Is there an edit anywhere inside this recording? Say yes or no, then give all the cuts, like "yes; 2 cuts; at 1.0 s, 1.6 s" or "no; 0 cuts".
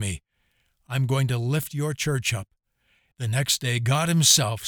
yes; 1 cut; at 3.1 s